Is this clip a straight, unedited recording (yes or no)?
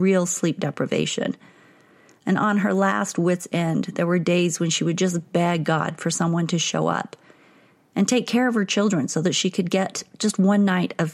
yes